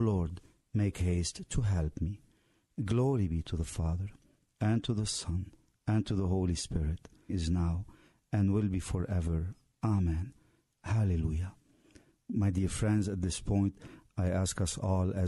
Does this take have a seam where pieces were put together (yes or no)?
yes